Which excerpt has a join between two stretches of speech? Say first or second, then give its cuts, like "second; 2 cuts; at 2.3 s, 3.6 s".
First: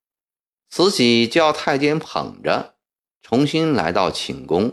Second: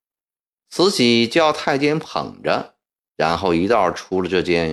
first; 1 cut; at 3.1 s